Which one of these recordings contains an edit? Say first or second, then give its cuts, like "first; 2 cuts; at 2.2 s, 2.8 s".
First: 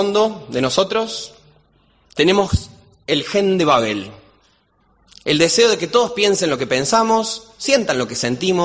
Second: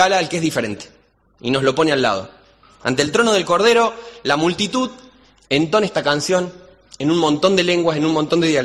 second; 1 cut; at 2.6 s